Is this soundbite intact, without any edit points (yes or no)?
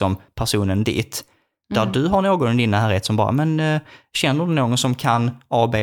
no